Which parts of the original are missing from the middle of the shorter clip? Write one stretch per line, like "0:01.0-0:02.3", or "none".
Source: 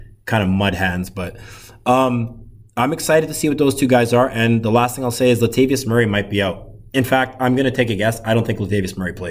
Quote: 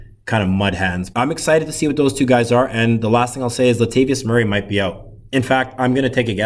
0:01.1-0:02.7